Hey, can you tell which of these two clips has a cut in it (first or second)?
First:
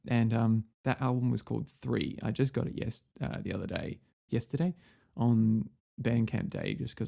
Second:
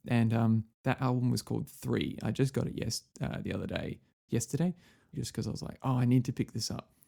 second